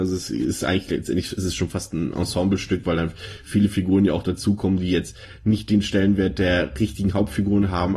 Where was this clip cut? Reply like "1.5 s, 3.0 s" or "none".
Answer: none